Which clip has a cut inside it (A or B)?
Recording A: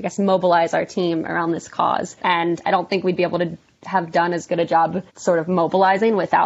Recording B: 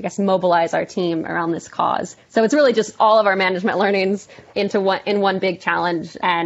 A